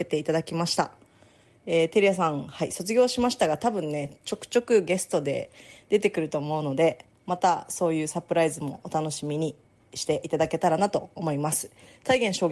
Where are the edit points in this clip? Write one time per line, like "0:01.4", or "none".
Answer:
none